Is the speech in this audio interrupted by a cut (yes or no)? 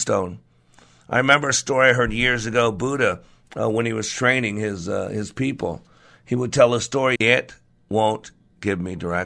yes